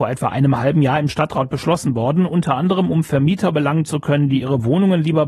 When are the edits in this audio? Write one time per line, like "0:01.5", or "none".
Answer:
none